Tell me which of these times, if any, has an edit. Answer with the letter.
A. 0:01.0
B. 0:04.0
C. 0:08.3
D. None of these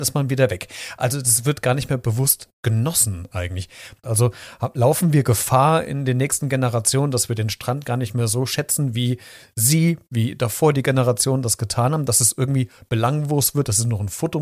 B